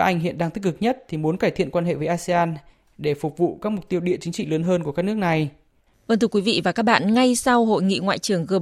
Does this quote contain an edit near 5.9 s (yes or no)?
yes